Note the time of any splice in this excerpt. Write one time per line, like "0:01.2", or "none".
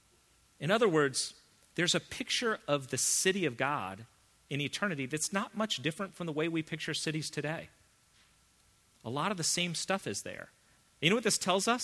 0:10.8